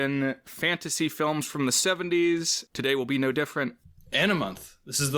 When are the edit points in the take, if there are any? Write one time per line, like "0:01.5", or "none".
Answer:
0:02.7

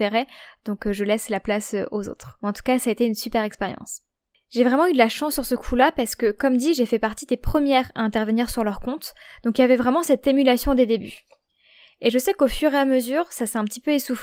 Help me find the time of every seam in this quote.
none

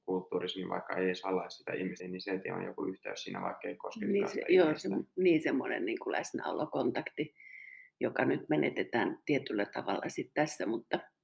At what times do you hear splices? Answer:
0:02.0

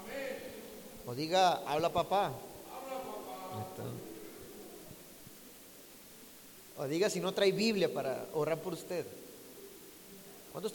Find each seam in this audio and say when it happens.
none

